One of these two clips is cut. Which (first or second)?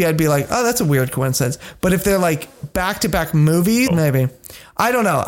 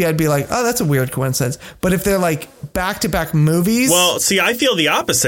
first